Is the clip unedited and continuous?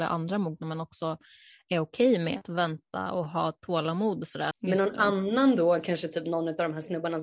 no; 1 cut; at 4.5 s

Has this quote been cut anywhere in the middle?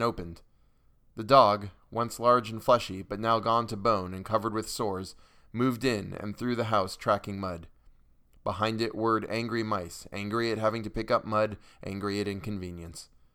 no; 0 cuts

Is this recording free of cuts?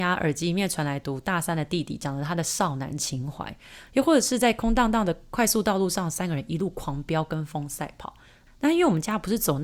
yes; 0 cuts

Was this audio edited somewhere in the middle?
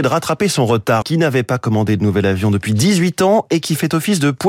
yes; 1 cut; at 1.0 s

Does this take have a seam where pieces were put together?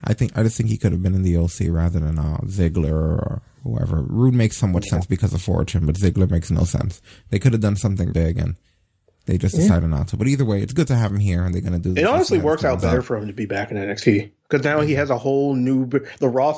yes; 1 cut; at 8.1 s

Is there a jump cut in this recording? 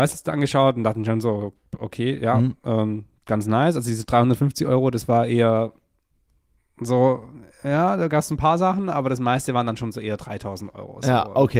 no; 0 cuts

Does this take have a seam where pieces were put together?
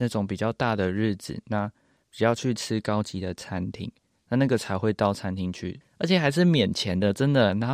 yes; 1 cut; at 5.8 s

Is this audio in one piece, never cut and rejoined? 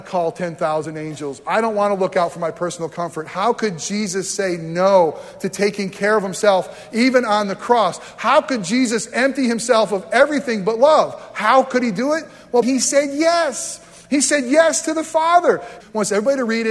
no; 2 cuts; at 12.6 s, 15.8 s

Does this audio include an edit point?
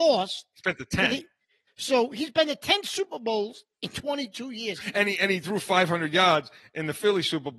yes; 2 cuts; at 1.7 s, 4.8 s

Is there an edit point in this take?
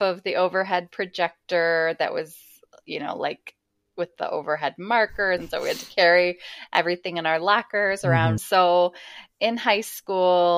yes; 2 cuts; at 5.4 s, 8.4 s

